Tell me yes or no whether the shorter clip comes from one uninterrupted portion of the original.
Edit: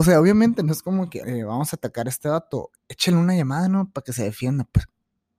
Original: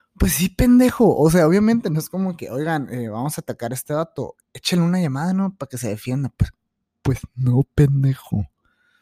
no